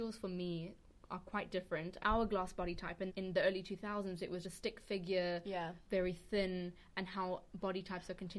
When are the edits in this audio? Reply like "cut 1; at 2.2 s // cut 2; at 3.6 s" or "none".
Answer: cut 1; at 2.0 s // cut 2; at 3.1 s // cut 3; at 4.4 s